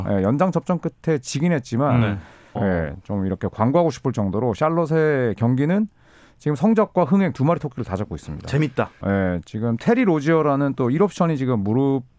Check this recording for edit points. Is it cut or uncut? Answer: cut